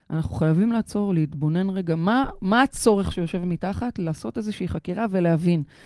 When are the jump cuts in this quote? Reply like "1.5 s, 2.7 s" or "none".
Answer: none